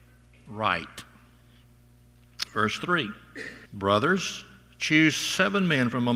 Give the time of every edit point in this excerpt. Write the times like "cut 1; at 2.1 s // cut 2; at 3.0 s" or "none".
cut 1; at 3.7 s